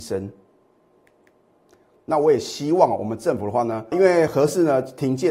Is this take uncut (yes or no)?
no